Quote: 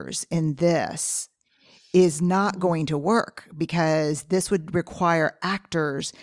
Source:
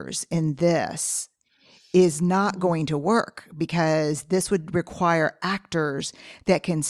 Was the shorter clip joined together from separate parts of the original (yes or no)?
no